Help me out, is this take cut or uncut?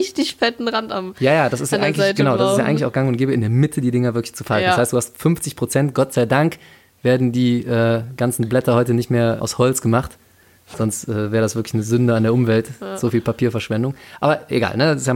cut